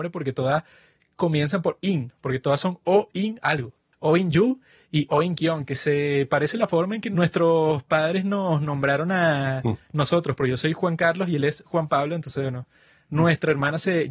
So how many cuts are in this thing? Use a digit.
1